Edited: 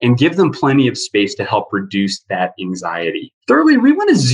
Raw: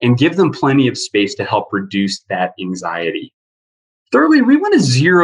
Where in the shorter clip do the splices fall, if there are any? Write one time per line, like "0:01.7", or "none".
0:03.4